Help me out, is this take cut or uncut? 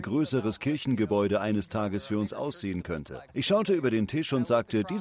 cut